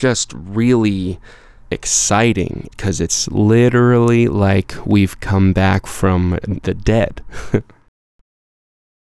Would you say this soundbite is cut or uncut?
uncut